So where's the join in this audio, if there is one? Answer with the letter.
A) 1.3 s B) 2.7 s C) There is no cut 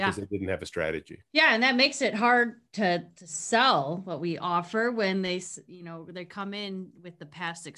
A